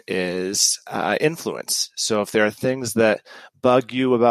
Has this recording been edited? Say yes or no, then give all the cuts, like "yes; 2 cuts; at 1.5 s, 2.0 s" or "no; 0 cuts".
no; 0 cuts